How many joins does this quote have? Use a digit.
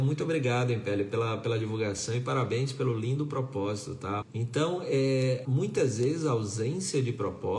2